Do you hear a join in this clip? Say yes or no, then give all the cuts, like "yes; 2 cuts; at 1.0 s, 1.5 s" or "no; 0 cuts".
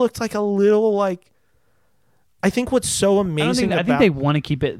no; 0 cuts